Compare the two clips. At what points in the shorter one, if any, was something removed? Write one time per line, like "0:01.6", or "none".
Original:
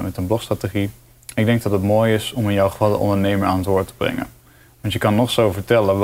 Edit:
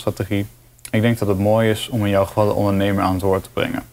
none